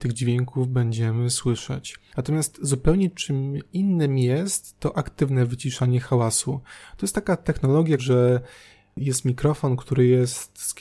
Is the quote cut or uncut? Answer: cut